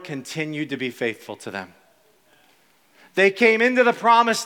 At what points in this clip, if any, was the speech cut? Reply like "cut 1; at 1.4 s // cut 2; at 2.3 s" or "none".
none